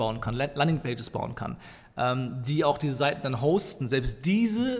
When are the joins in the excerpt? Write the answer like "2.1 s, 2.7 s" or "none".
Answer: none